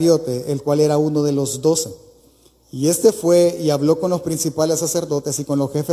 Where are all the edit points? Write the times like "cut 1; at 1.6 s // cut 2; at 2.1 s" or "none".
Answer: none